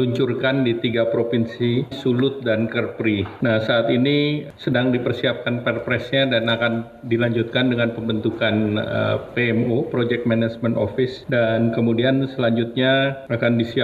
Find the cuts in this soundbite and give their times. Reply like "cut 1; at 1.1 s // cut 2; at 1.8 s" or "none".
cut 1; at 1.9 s

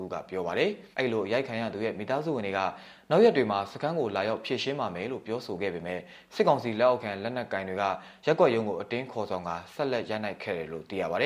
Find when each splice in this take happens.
cut 1; at 0.9 s

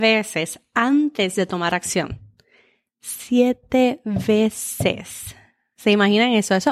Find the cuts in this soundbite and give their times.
none

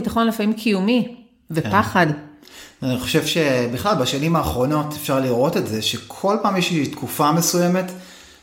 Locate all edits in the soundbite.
none

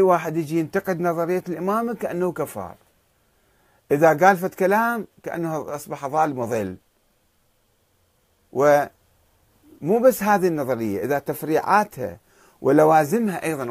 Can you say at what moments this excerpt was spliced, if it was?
none

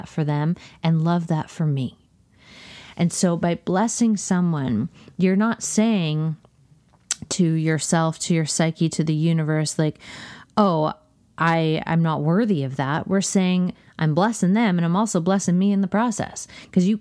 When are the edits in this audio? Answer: none

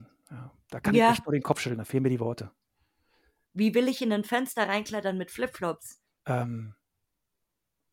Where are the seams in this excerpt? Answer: cut 1; at 3.5 s // cut 2; at 6.2 s

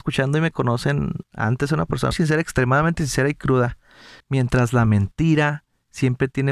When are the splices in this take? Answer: cut 1; at 2.1 s // cut 2; at 4.2 s

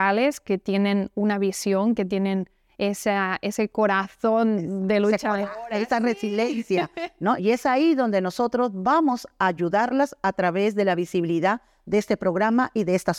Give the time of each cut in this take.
cut 1; at 7.4 s

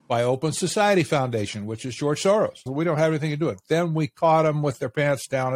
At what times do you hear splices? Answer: cut 1; at 2.7 s

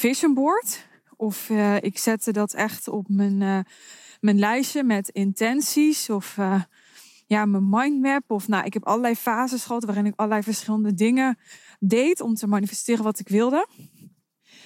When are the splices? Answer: none

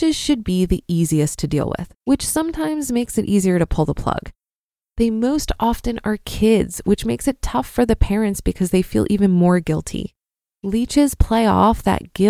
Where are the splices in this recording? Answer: cut 1; at 2.0 s

